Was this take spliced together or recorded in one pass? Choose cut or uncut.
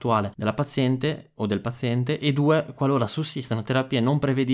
uncut